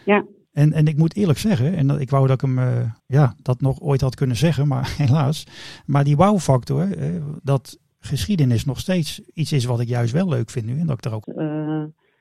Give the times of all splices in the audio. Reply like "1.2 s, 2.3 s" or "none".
3.0 s, 7.4 s, 11.2 s